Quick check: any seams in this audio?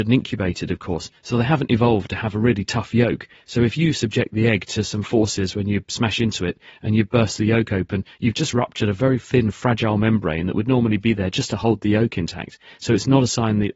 no; 0 cuts

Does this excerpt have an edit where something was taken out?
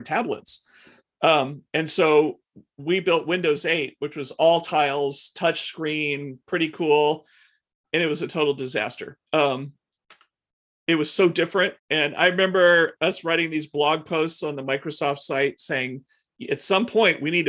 yes; 2 cuts; at 9.2 s, 11.8 s

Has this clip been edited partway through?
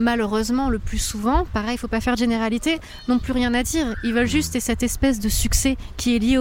no; 0 cuts

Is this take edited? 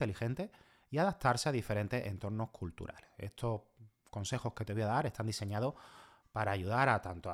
no; 0 cuts

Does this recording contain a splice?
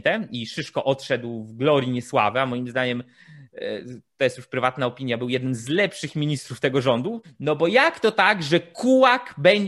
yes; 1 cut; at 7.2 s

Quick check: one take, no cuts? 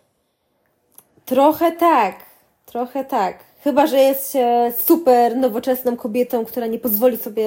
yes; 0 cuts

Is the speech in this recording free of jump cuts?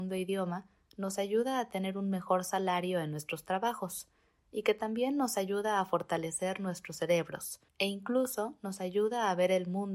no; 1 cut; at 7.7 s

